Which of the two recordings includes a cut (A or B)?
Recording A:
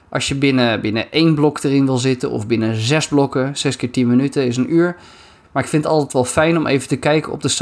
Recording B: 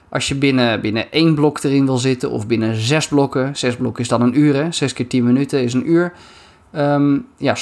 A